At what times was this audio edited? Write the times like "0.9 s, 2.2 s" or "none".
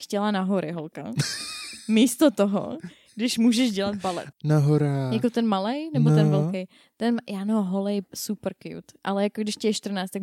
4.3 s